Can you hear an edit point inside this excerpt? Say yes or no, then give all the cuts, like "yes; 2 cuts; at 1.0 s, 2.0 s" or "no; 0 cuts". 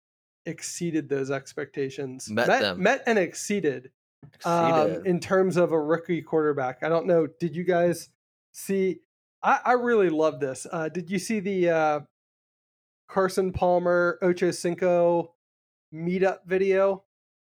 no; 0 cuts